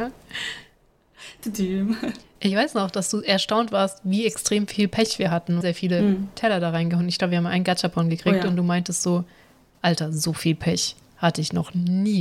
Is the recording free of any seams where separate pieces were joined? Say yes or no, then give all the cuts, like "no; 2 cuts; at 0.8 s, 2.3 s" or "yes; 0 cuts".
no; 1 cut; at 5.6 s